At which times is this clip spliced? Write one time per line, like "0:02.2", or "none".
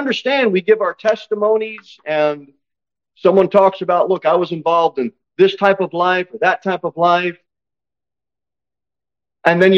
none